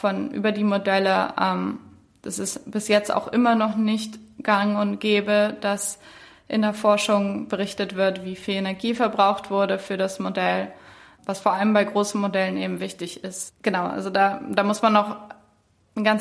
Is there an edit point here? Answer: no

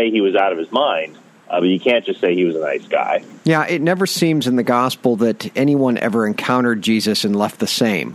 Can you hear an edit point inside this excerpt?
no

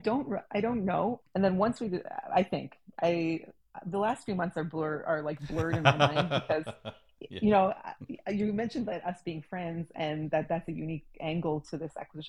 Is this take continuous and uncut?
no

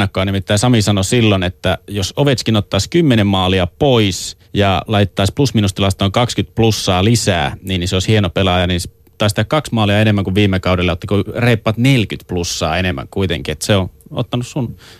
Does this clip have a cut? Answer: yes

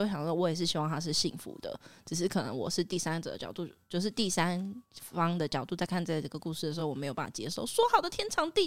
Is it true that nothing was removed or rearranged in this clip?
yes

